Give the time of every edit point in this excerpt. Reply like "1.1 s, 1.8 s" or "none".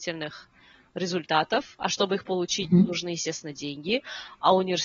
none